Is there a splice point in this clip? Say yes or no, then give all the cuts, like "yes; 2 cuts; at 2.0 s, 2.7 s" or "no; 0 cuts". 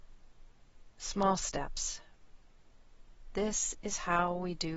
no; 0 cuts